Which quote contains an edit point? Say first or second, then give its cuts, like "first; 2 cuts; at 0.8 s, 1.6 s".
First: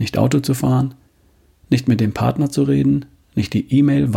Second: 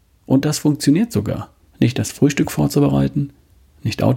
second; 1 cut; at 1.7 s